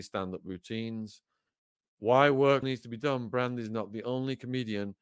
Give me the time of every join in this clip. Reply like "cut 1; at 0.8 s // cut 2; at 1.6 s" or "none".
cut 1; at 2.6 s